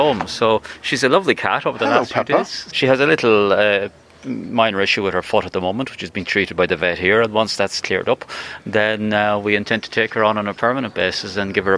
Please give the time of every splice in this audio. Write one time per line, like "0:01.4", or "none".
0:02.7